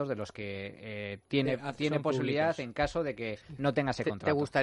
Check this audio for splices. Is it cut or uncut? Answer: uncut